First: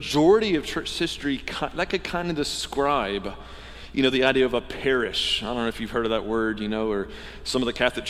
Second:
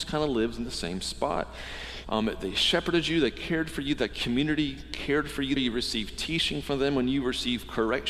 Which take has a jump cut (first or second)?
second